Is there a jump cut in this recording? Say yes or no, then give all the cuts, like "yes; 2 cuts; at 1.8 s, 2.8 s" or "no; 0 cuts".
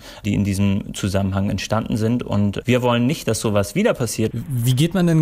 yes; 1 cut; at 4.3 s